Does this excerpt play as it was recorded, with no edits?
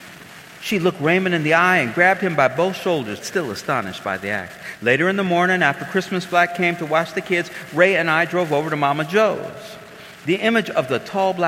no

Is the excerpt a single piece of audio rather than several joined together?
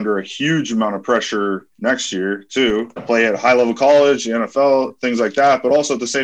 no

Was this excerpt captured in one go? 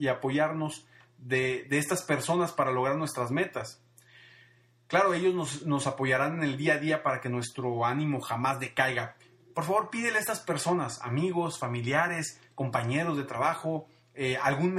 yes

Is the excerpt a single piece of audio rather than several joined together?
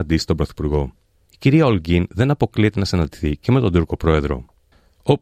no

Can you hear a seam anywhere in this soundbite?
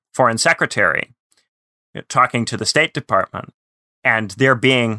no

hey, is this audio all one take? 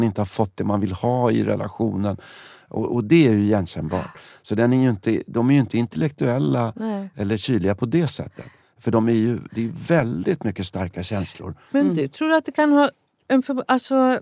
yes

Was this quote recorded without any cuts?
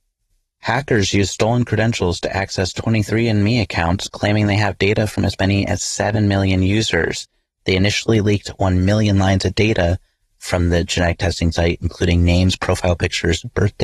yes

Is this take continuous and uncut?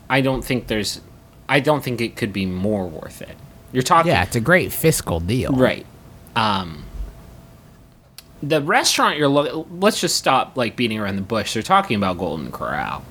yes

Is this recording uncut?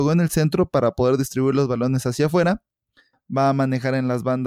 no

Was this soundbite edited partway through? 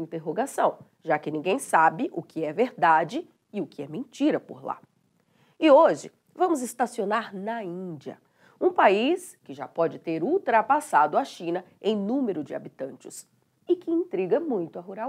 no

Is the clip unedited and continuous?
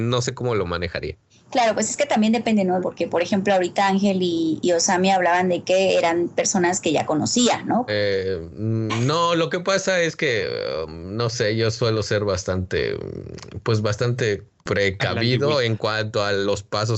no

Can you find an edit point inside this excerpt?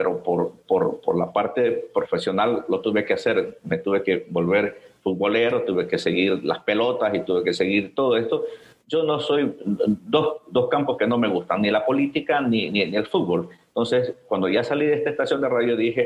no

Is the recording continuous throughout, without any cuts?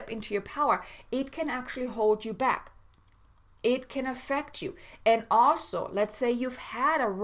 yes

